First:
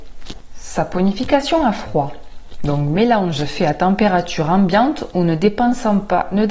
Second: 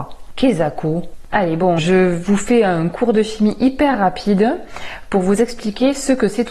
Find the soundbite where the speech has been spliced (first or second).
second